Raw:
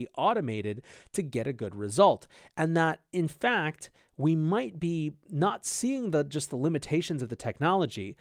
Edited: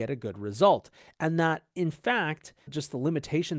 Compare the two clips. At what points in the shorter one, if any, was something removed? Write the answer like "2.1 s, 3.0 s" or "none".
2.7 s